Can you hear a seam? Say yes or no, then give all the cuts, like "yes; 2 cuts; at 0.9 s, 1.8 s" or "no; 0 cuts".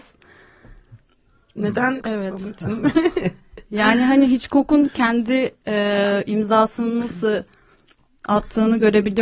yes; 1 cut; at 2.0 s